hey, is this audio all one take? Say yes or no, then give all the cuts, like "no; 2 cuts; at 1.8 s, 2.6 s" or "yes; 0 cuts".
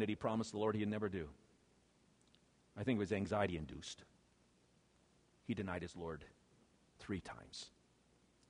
yes; 0 cuts